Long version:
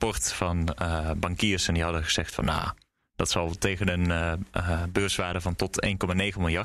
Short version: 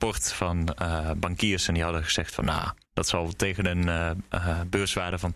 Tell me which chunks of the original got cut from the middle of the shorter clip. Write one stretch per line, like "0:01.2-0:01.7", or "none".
0:02.8-0:03.1